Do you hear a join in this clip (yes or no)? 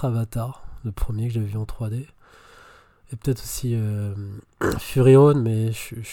no